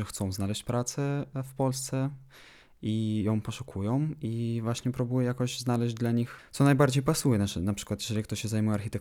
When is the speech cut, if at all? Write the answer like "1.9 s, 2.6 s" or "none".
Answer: none